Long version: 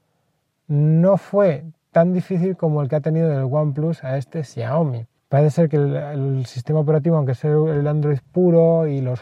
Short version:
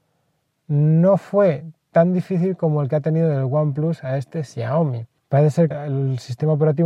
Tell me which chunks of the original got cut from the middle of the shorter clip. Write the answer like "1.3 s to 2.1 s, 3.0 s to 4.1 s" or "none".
5.7 s to 6.0 s